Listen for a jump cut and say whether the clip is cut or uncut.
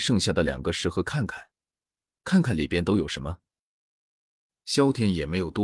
uncut